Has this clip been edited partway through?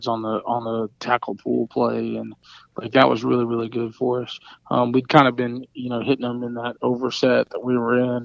no; 0 cuts

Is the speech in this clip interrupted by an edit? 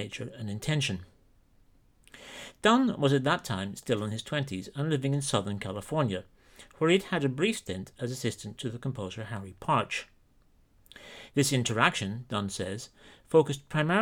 yes; 1 cut; at 11.3 s

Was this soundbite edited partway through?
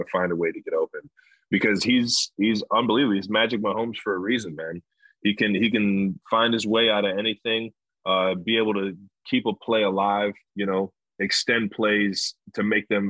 yes; 1 cut; at 10.5 s

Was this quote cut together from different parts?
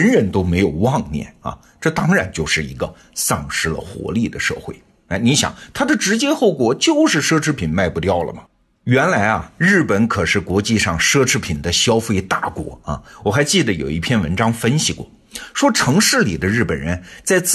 no; 0 cuts

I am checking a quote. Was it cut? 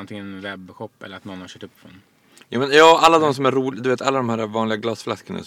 no; 0 cuts

